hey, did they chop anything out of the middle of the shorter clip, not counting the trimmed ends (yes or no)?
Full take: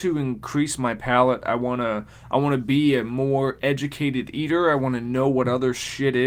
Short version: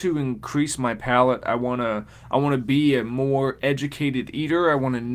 no